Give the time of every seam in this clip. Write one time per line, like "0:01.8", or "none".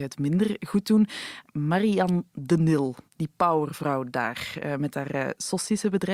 0:03.1